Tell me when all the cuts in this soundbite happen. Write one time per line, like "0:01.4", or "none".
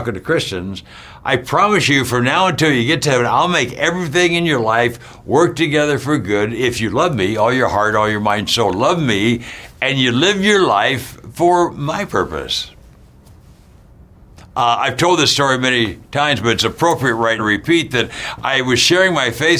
0:14.4
0:17.4